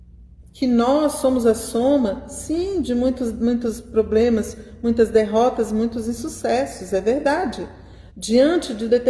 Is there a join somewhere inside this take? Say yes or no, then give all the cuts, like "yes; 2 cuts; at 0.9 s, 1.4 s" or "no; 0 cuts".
yes; 1 cut; at 8.1 s